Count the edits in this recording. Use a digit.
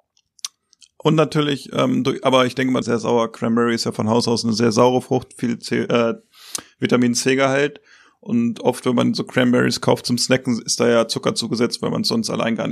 1